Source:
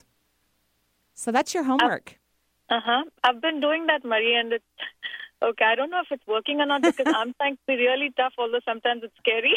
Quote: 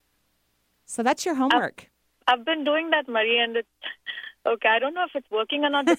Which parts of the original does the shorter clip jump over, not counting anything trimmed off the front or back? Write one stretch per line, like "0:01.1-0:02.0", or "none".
0:02.5-0:03.2